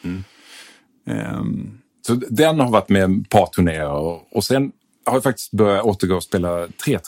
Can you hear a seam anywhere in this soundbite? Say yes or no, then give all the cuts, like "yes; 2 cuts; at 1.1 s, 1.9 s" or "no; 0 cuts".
no; 0 cuts